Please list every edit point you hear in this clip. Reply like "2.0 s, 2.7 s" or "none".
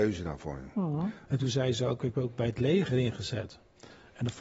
1.2 s